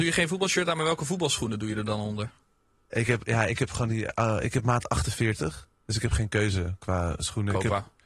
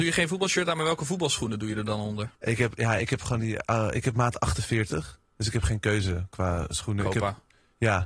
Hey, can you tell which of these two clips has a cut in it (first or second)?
second